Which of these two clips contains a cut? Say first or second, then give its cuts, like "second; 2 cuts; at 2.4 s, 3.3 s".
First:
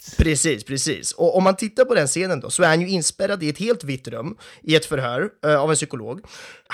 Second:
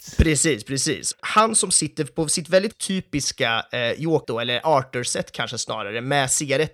second; 2 cuts; at 1.1 s, 4.2 s